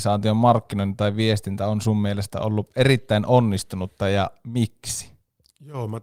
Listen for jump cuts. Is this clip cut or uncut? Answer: uncut